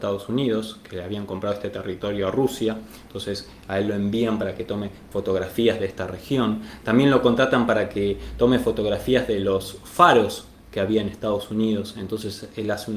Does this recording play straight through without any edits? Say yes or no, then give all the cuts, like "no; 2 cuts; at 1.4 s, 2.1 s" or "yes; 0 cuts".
yes; 0 cuts